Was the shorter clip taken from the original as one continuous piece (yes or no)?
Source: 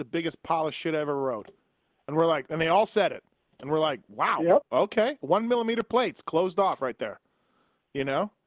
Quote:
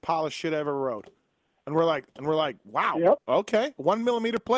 no